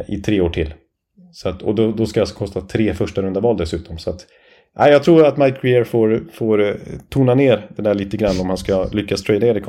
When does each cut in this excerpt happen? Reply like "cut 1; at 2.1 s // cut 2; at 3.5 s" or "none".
none

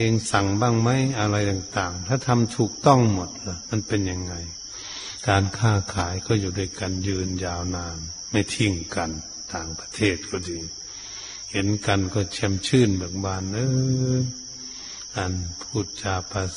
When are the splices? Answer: none

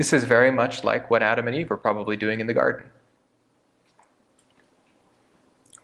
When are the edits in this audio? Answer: none

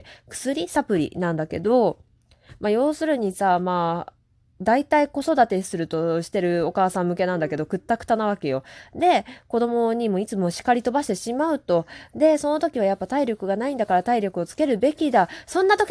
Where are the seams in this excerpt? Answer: none

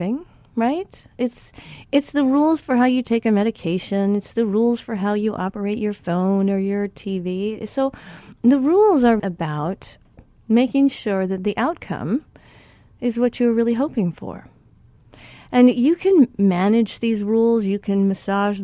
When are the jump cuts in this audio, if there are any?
cut 1; at 9.2 s

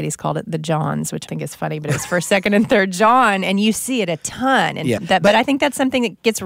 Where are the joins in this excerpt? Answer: cut 1; at 1.3 s // cut 2; at 5.0 s

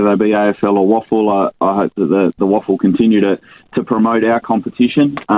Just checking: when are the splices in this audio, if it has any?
none

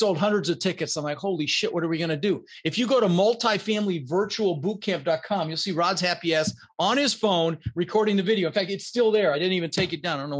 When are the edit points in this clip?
none

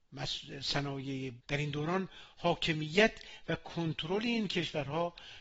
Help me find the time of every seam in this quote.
cut 1; at 1.4 s

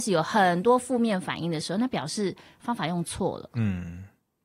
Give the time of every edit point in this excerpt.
none

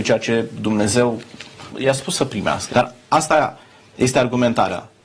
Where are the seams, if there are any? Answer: cut 1; at 1.7 s // cut 2; at 2.7 s

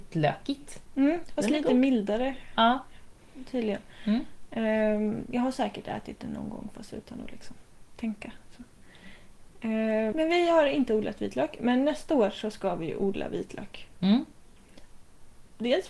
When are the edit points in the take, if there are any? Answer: cut 1; at 10.1 s

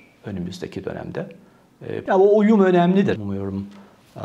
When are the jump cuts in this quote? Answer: cut 1; at 2.1 s // cut 2; at 3.2 s

